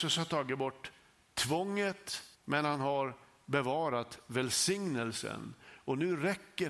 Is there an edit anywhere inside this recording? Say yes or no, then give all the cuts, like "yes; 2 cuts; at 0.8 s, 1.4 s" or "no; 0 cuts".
yes; 1 cut; at 2.3 s